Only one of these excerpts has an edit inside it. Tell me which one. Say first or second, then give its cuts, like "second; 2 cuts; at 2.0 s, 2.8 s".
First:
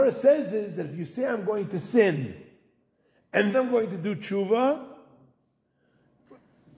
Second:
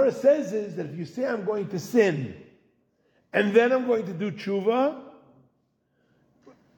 first; 1 cut; at 3.5 s